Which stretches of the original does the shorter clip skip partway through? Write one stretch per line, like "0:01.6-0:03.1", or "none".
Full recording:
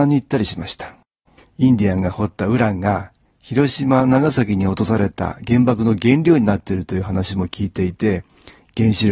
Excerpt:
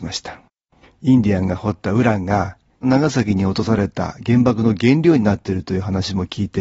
0:03.4-0:04.0